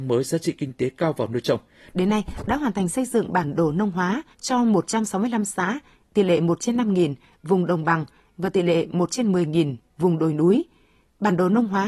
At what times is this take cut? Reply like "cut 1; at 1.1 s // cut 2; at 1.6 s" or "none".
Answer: cut 1; at 1.9 s // cut 2; at 4.3 s